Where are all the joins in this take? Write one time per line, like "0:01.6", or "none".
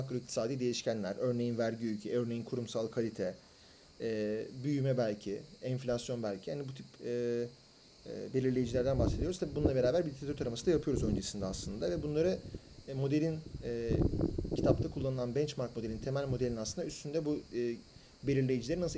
none